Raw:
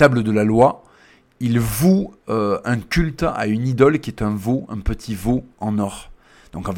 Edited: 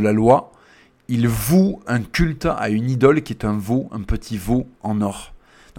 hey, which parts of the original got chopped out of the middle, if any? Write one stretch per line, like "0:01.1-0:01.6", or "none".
0:02.2-0:02.6